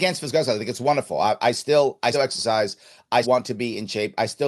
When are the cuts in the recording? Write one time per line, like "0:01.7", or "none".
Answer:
0:02.1
0:03.2

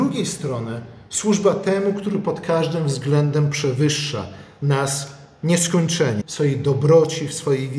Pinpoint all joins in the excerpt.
0:06.2

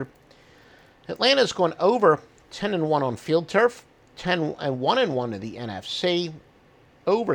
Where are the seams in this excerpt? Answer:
none

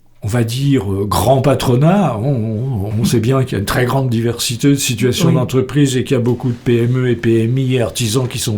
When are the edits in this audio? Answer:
0:02.9

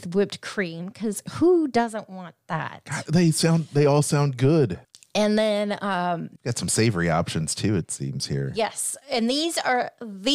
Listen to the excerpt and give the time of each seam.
none

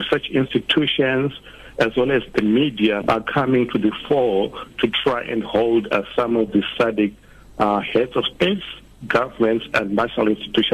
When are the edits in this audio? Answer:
0:03.0

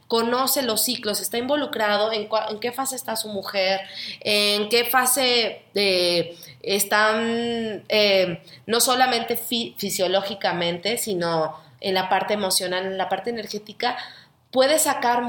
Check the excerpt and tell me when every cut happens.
none

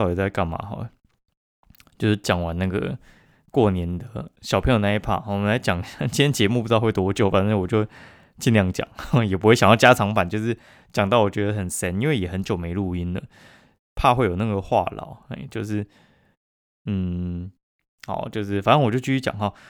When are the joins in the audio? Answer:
none

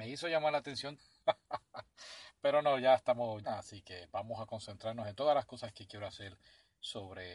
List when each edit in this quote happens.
0:01.0
0:03.4

